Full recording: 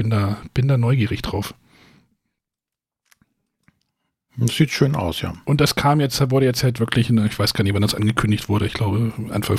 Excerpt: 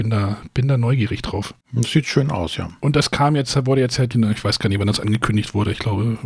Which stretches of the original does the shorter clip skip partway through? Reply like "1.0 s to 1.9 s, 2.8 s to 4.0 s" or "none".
1.6 s to 4.3 s, 6.8 s to 7.1 s